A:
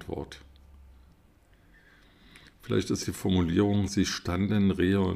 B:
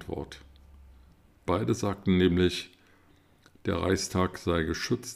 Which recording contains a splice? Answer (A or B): B